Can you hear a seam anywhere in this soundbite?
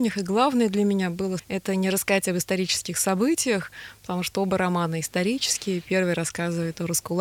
yes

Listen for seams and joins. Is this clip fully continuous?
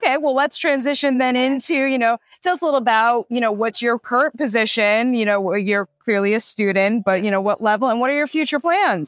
yes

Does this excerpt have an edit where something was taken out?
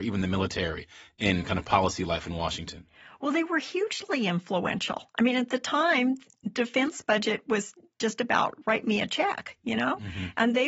no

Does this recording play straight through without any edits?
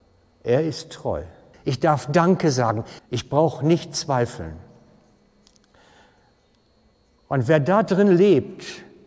no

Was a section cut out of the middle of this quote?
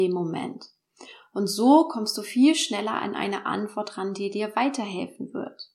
no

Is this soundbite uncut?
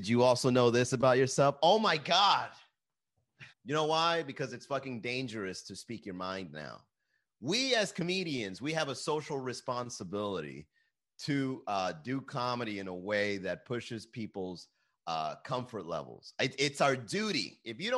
no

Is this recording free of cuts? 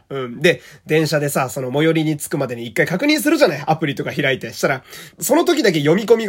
no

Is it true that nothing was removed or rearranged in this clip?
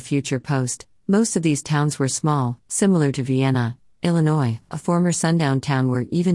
yes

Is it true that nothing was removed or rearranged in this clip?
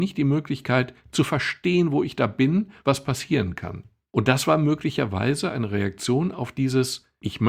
no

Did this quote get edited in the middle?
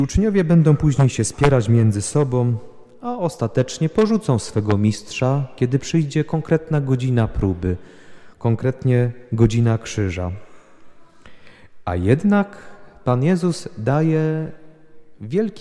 no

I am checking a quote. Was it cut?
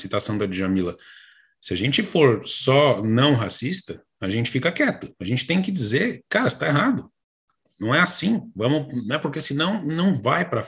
no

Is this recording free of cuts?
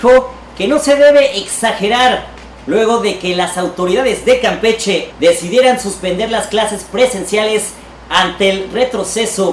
no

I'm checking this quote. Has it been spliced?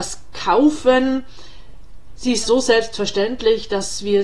yes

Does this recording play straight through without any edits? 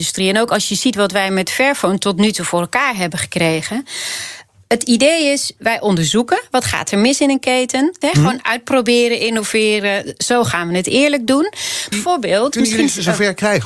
no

